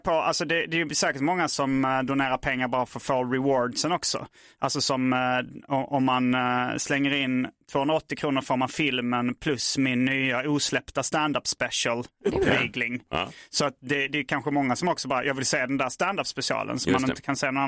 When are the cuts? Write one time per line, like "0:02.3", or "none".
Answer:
none